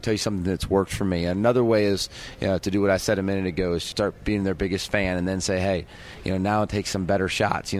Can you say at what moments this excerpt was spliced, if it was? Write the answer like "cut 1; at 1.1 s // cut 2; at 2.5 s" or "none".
cut 1; at 3.9 s